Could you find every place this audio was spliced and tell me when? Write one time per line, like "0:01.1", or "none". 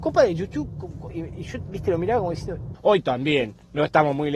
0:02.7